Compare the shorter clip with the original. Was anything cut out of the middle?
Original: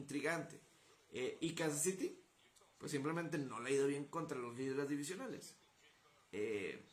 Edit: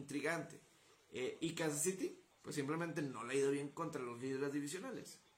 yes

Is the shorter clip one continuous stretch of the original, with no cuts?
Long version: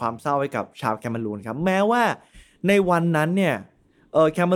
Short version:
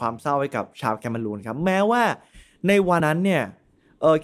no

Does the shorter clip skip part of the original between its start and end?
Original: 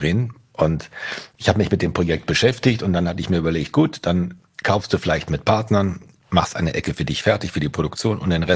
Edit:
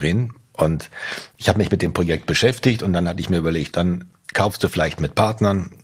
yes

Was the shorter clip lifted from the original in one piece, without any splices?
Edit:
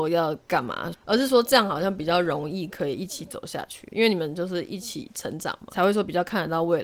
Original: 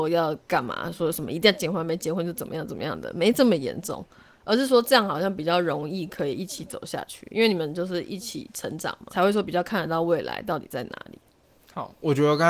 no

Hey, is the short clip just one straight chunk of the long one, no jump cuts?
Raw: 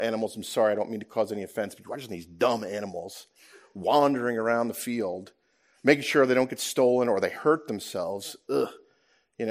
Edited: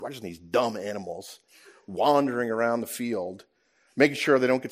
yes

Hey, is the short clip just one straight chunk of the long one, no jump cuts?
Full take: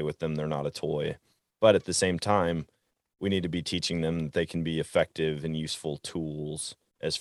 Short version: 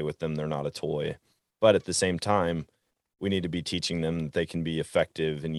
yes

